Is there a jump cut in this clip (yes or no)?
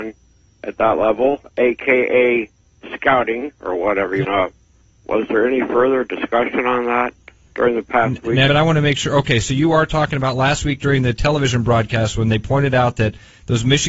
yes